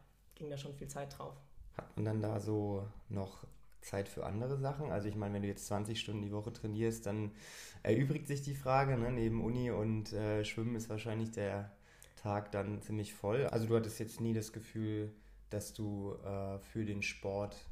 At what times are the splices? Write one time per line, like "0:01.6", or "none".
0:13.5